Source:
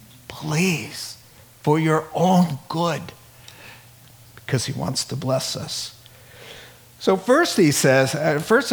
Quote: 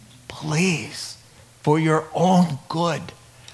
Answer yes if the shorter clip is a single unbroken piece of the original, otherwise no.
yes